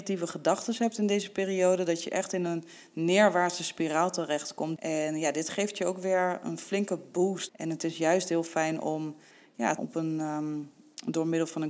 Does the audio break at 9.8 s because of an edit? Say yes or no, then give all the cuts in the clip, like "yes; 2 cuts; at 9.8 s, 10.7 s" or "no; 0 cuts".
yes; 3 cuts; at 4.8 s, 7.5 s, 9.8 s